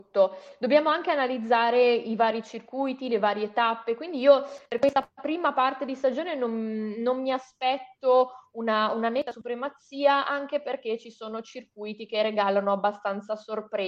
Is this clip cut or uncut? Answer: uncut